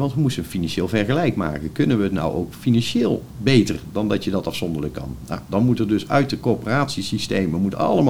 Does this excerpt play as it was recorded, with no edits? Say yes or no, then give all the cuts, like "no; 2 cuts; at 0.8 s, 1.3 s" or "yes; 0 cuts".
yes; 0 cuts